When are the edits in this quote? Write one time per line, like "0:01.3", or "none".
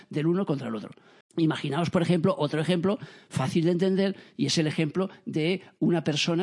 0:01.2